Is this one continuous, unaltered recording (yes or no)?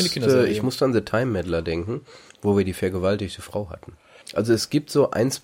no